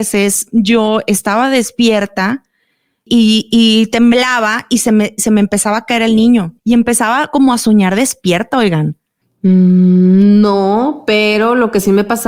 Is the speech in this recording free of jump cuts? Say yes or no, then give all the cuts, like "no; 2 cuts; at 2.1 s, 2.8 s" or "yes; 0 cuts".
no; 3 cuts; at 3.1 s, 6.6 s, 9.2 s